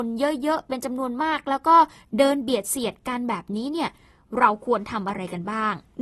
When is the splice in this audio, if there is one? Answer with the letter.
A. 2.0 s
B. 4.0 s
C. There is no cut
C